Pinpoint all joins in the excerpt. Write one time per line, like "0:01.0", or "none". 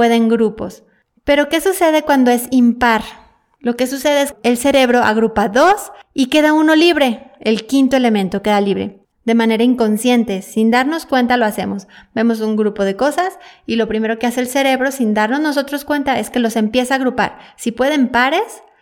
0:03.6
0:09.1